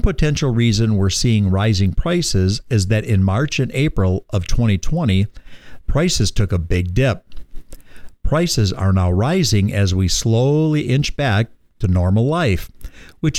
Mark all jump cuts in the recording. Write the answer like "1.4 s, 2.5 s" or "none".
5.8 s